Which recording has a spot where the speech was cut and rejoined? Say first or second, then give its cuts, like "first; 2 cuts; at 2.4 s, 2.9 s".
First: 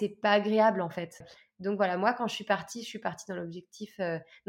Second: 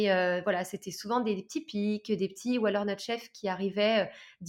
first; 1 cut; at 1.2 s